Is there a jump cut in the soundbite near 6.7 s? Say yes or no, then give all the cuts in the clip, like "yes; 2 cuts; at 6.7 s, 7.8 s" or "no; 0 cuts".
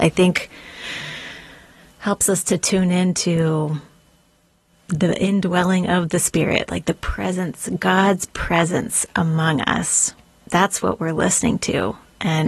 yes; 1 cut; at 6.7 s